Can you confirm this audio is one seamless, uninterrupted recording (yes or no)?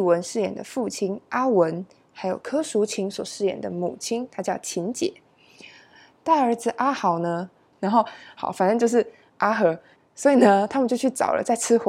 no